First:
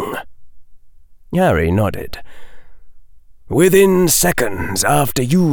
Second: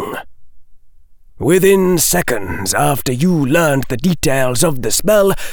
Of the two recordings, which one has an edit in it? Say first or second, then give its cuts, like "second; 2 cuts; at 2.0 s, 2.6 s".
second; 1 cut; at 1.3 s